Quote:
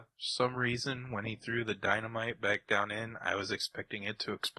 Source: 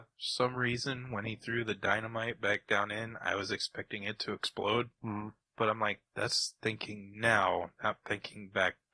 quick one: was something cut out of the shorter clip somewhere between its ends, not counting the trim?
no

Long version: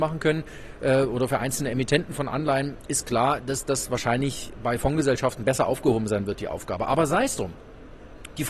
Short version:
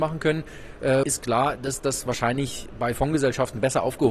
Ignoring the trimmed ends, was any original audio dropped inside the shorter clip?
yes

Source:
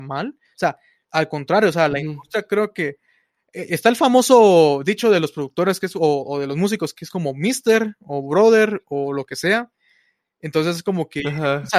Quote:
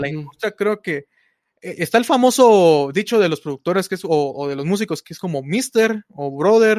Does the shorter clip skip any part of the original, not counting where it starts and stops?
no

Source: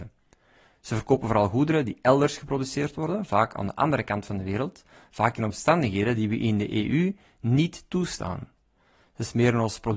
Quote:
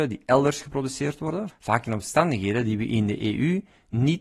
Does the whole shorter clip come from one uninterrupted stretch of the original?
no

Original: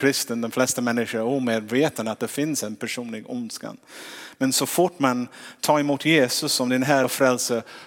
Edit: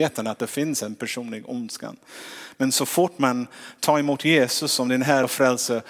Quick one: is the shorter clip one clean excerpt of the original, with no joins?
yes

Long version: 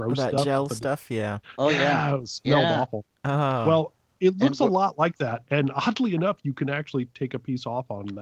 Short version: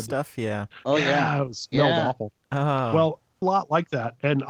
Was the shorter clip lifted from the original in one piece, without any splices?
no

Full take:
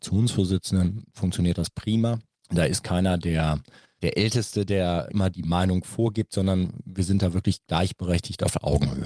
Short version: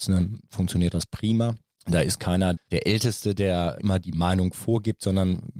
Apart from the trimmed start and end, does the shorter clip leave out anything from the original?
yes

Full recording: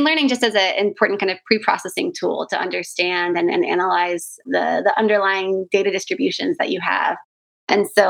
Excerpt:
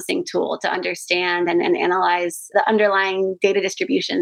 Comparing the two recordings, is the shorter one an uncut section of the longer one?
no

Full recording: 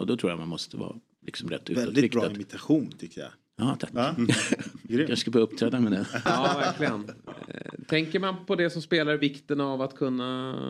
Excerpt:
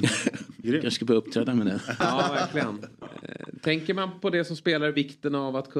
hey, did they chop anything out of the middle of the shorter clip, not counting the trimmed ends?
no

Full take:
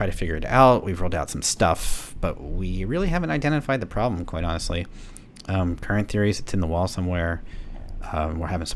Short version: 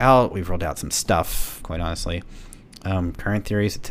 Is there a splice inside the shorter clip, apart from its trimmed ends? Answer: yes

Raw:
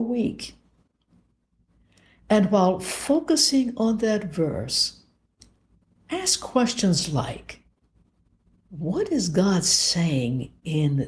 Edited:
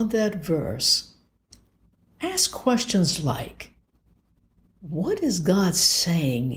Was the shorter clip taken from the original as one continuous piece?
yes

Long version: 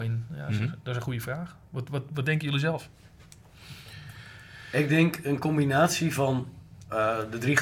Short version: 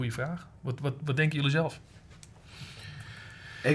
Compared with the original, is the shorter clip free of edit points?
yes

